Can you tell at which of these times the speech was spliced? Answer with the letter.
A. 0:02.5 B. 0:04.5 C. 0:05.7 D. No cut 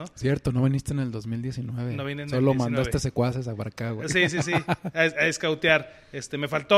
D